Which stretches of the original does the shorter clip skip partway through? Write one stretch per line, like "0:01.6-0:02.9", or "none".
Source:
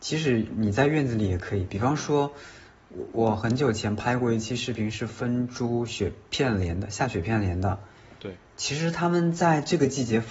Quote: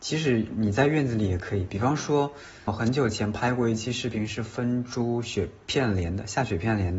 0:02.7-0:03.3